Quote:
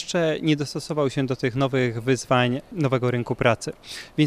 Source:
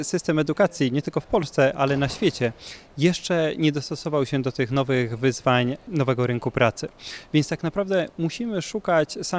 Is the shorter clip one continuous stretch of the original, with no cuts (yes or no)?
yes